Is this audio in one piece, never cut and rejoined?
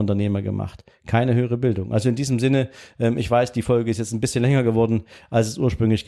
yes; 0 cuts

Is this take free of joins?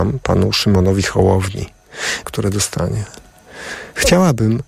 no; 1 cut; at 2.2 s

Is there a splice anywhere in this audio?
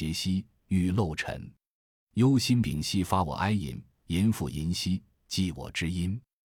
yes; 1 cut; at 2.6 s

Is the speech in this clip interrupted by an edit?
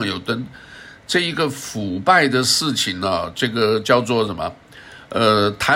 no; 0 cuts

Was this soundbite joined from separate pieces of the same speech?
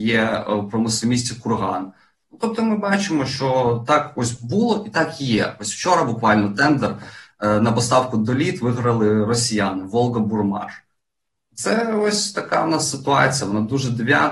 yes; 1 cut; at 1.0 s

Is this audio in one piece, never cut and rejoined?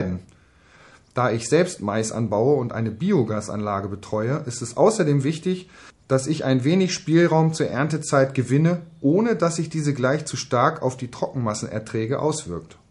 yes; 0 cuts

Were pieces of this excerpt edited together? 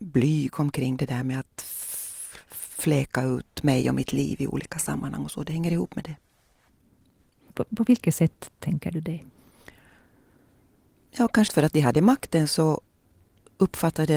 yes; 2 cuts; at 7.5 s, 11.5 s

